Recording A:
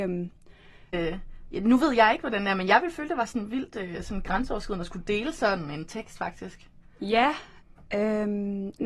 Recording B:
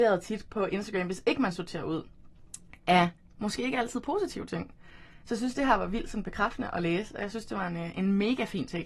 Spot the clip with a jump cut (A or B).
A